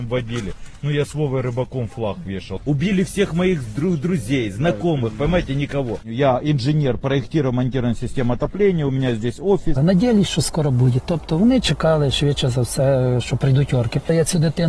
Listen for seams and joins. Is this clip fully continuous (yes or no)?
no